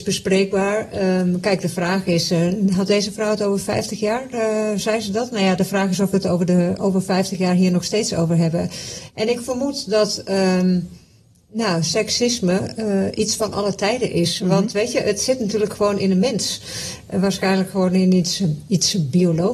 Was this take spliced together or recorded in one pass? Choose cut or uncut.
uncut